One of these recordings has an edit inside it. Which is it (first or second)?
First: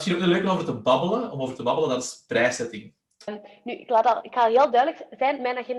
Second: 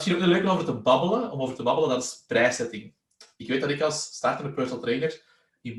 first